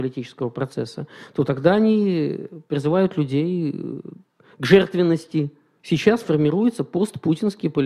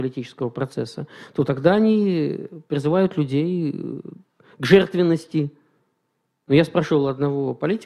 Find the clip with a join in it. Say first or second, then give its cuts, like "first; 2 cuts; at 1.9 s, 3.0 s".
first; 1 cut; at 5.8 s